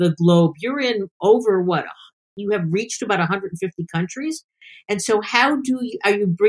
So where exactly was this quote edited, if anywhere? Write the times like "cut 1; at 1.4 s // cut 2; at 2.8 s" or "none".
none